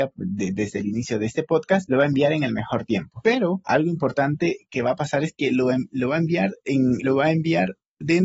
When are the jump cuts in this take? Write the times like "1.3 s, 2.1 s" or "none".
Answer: 7.0 s